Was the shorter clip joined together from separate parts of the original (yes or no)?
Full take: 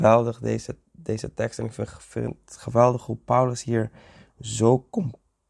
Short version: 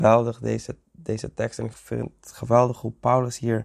yes